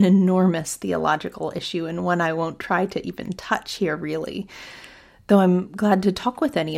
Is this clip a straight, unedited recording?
yes; 0 cuts

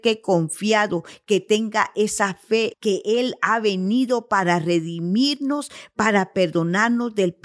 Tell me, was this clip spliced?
yes; 1 cut; at 2.7 s

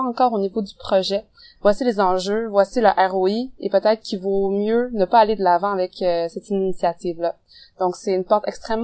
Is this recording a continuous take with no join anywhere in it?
no; 1 cut; at 1.6 s

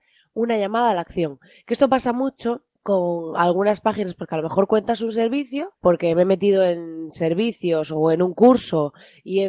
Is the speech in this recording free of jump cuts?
no; 2 cuts; at 2.8 s, 5.8 s

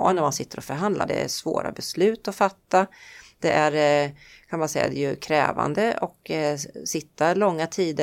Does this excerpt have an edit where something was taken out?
yes; 1 cut; at 1.1 s

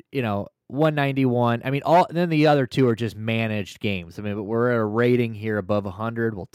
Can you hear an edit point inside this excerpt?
no; 0 cuts

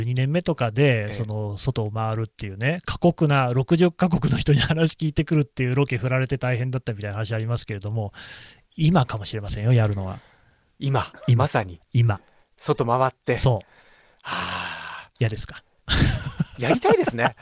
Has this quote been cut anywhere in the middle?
no; 0 cuts

